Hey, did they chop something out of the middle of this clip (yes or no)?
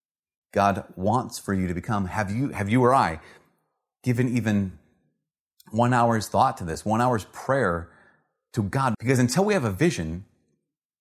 yes